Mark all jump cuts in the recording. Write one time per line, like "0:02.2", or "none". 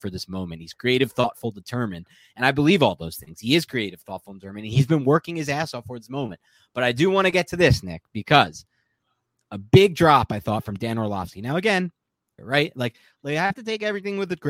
0:12.4